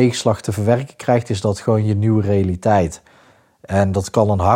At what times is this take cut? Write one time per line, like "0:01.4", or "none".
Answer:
none